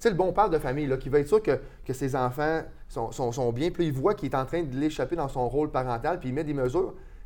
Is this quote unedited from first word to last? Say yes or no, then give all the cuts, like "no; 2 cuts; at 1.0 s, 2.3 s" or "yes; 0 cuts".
yes; 0 cuts